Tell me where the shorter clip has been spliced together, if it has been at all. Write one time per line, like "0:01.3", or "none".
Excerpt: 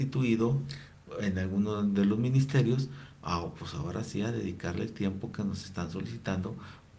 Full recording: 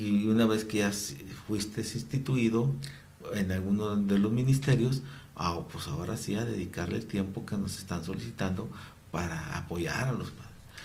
none